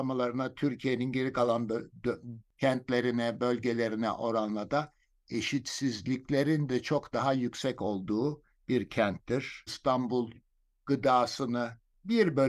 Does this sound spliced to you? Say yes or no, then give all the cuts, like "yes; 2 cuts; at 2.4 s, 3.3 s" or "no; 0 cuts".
yes; 1 cut; at 9.7 s